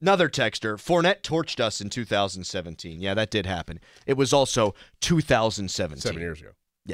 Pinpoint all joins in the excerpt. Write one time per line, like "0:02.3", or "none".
none